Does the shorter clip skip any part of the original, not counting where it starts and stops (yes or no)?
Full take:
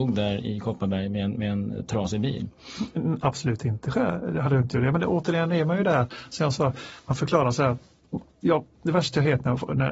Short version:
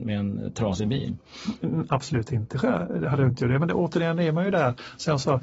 no